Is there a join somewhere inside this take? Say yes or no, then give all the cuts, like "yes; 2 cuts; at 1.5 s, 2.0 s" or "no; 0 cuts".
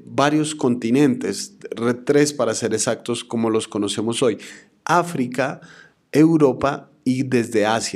no; 0 cuts